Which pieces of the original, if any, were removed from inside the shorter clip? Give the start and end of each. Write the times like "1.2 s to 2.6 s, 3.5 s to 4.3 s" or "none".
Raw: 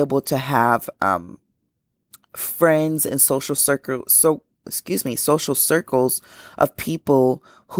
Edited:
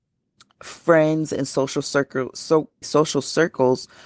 4.6 s to 5.2 s